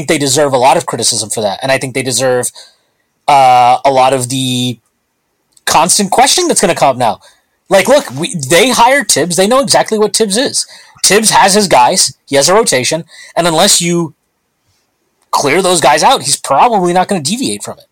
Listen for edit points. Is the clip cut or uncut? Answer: uncut